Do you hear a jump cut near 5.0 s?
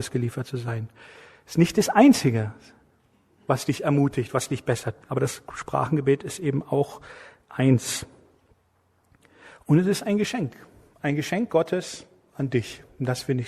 yes; 1 cut; at 5.0 s

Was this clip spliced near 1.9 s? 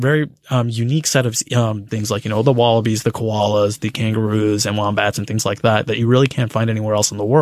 yes; 1 cut; at 1.9 s

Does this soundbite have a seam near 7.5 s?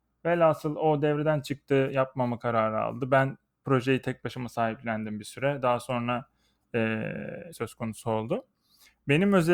yes; 1 cut; at 7.5 s

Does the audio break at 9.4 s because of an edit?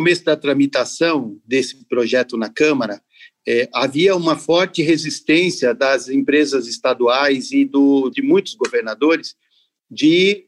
no; 1 cut; at 8.1 s

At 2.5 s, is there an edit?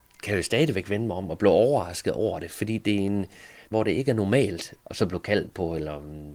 no; 2 cuts; at 3.7 s, 4.8 s

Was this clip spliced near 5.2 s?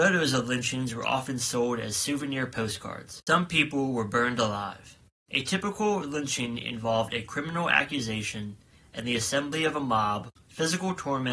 no; 3 cuts; at 3.3 s, 8.8 s, 10.4 s

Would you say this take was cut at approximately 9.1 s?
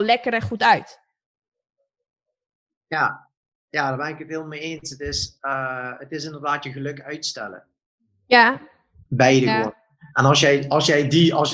yes; 1 cut; at 9.1 s

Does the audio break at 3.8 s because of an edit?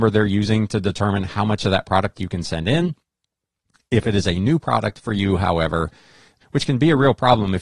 no; 1 cut; at 6.4 s

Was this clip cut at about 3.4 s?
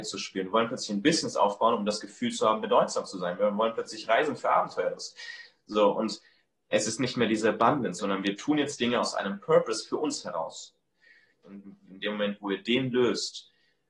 no; 2 cuts; at 8.0 s, 11.4 s

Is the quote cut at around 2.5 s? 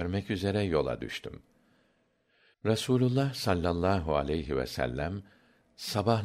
yes; 1 cut; at 2.5 s

